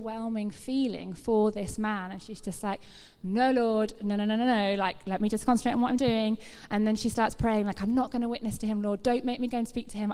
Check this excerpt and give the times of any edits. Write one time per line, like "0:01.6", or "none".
none